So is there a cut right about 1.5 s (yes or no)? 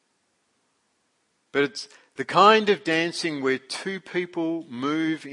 yes